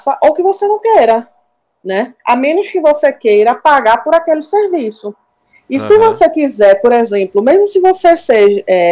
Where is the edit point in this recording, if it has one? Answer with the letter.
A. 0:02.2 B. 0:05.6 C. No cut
A